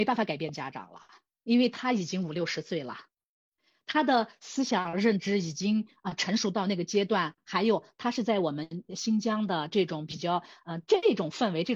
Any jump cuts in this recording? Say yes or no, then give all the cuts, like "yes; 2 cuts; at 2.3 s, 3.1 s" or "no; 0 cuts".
no; 0 cuts